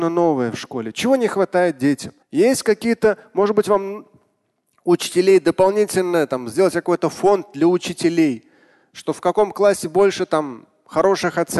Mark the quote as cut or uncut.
cut